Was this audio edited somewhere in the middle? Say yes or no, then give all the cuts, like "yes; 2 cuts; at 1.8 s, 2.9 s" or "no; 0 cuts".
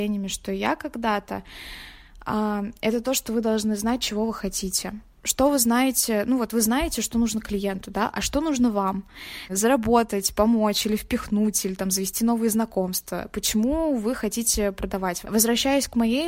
yes; 2 cuts; at 9.5 s, 15.2 s